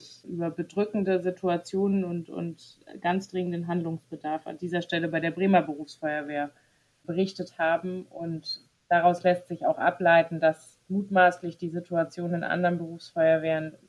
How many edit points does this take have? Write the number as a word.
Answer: zero